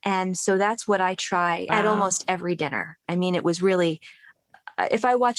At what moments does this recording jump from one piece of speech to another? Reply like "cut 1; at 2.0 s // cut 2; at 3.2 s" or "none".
cut 1; at 1.7 s